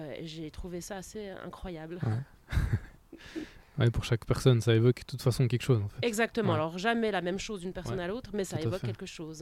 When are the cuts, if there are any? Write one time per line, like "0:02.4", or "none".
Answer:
none

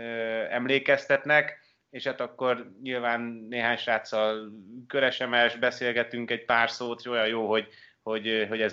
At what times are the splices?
none

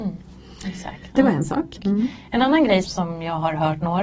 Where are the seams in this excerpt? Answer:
0:01.8
0:02.8

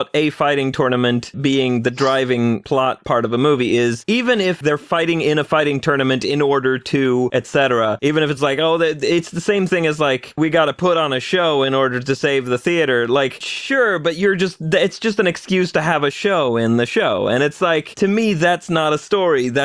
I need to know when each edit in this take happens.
none

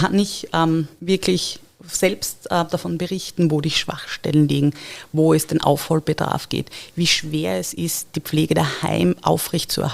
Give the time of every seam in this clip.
none

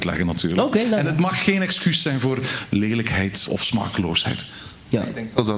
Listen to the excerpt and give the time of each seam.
0:03.5

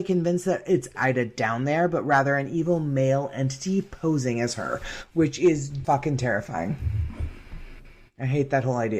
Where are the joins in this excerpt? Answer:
0:00.9
0:05.8

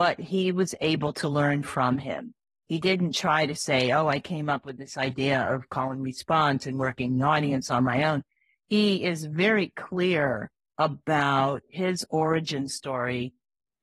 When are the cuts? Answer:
none

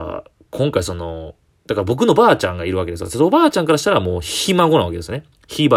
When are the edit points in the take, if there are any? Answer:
none

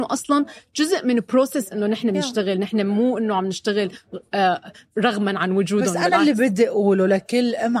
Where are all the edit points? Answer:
none

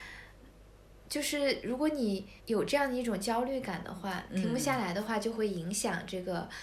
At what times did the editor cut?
0:02.4
0:04.3

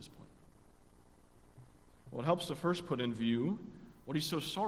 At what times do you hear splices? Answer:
none

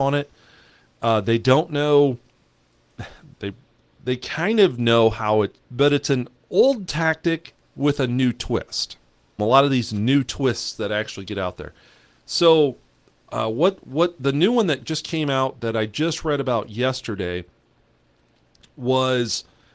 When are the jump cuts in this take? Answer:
0:05.6
0:09.4

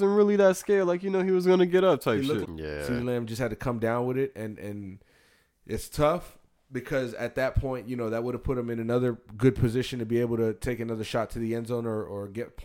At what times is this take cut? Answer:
0:02.4

